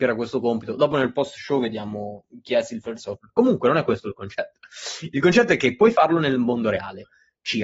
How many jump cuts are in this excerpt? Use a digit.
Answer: 0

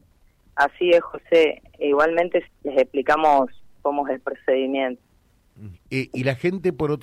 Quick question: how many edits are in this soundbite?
2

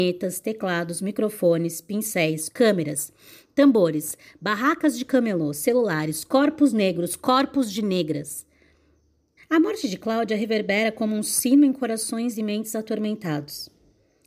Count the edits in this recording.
2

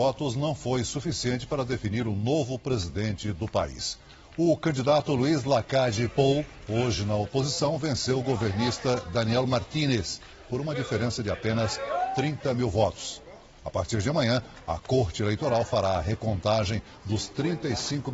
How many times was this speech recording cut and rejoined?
0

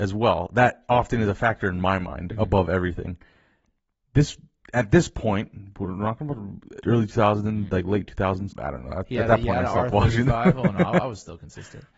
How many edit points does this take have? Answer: 2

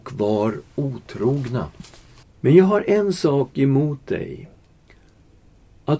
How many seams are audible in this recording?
1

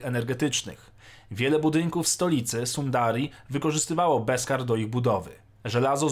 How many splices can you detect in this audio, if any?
0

